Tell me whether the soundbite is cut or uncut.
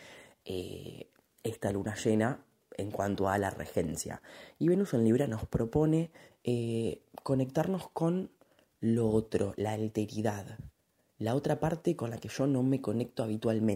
uncut